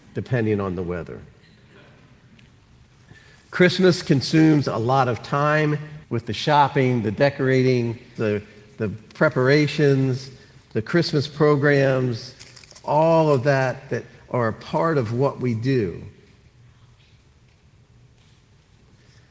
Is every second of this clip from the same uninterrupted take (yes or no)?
no